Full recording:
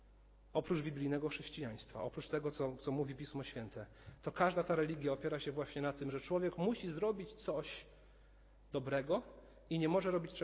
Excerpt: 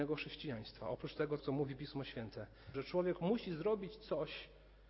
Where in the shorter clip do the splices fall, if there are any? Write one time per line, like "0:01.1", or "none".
0:01.4
0:02.7